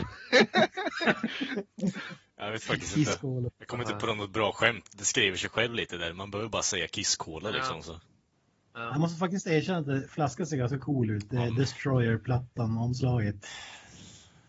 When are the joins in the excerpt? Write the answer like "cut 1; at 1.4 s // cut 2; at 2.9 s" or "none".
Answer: cut 1; at 3.5 s